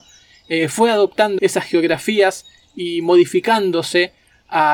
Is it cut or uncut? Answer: cut